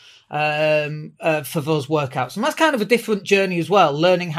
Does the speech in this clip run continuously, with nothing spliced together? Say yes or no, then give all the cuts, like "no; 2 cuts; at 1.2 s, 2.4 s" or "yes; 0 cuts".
yes; 0 cuts